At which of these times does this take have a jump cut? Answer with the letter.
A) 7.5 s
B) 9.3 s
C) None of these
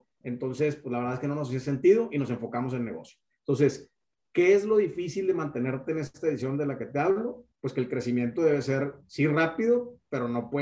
A